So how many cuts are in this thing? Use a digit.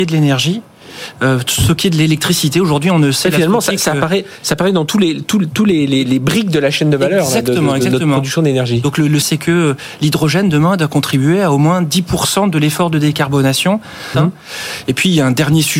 2